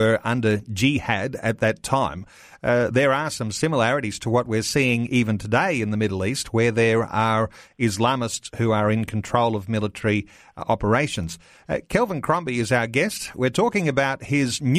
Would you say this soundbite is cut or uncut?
uncut